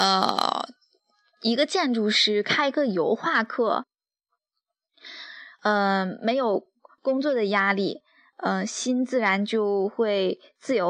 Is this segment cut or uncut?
cut